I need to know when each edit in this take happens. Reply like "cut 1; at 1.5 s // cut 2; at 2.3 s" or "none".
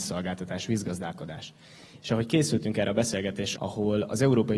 cut 1; at 2.0 s // cut 2; at 3.5 s